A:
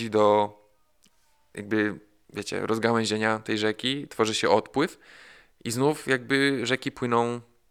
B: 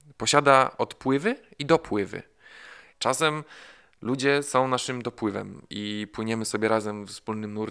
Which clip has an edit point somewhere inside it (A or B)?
B